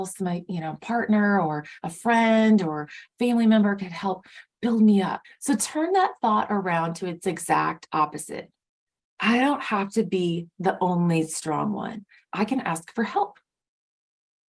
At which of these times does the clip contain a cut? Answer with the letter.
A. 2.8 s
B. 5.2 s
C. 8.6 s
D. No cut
B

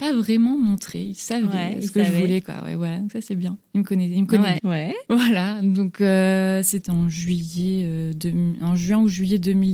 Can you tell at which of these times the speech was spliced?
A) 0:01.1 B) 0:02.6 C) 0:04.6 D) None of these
C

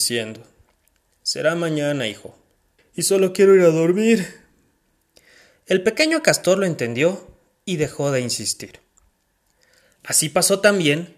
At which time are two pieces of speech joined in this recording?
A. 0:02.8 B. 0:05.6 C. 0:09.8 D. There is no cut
A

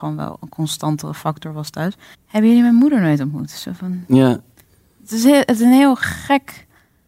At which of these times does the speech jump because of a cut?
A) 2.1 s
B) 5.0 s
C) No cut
A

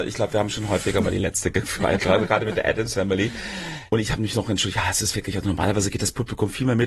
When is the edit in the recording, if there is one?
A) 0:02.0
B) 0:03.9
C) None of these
B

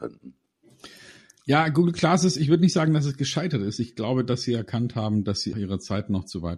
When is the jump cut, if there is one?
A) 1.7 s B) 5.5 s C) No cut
B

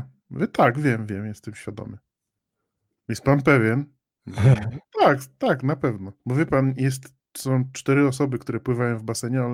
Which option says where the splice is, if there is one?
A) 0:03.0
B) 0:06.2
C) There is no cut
B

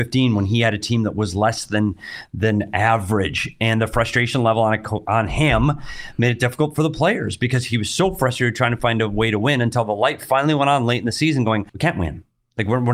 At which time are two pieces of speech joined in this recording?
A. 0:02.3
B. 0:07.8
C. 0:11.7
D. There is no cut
C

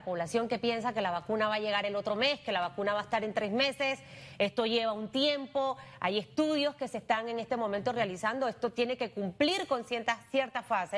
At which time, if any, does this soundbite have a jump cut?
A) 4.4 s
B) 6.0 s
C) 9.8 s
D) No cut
D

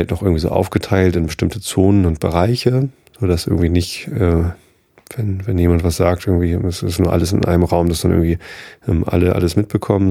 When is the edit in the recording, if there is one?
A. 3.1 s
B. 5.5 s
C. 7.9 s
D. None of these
D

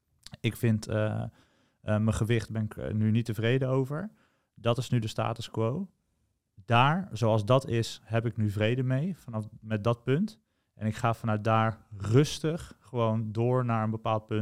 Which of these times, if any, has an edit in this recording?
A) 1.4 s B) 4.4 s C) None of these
C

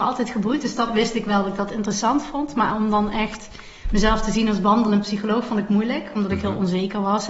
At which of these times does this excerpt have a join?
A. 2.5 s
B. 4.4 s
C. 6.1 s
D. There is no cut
D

